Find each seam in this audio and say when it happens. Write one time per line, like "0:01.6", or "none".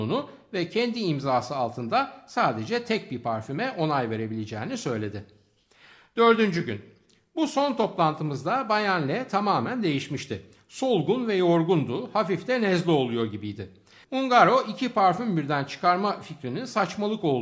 0:14.0